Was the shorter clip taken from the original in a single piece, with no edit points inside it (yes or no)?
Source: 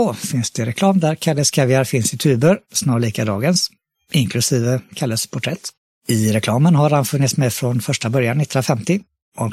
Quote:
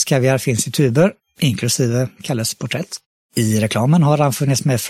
no